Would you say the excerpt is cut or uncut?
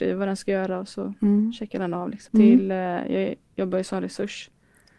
cut